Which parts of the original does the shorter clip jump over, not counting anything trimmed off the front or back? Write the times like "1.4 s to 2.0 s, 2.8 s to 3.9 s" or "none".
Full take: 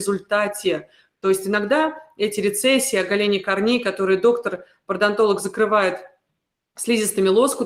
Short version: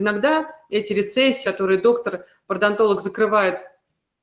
2.9 s to 3.8 s

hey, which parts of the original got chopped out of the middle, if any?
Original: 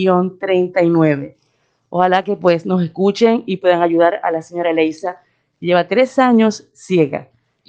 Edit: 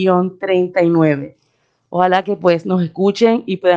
none

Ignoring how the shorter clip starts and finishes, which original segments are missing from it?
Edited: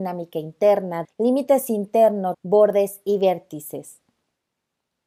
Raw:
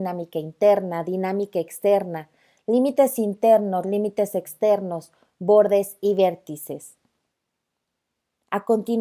1.0 s to 2.5 s, 3.8 s to 5.3 s

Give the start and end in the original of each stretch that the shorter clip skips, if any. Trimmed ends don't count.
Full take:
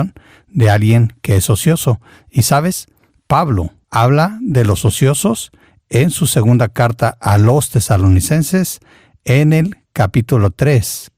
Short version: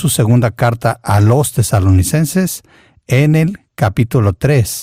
none

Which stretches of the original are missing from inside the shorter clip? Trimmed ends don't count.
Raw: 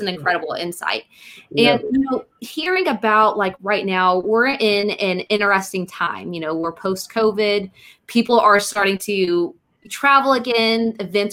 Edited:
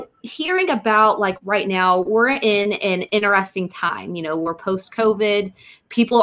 none

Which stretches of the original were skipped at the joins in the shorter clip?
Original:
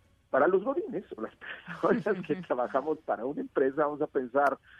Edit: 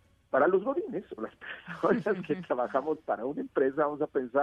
none

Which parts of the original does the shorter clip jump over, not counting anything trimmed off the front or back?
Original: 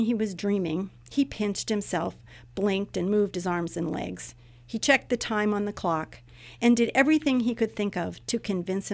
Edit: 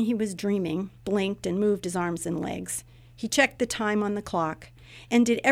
1.0 s to 2.5 s

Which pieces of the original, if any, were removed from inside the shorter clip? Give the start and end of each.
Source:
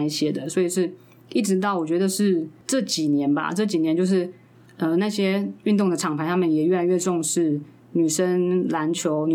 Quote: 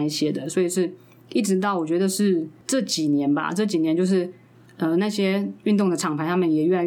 none

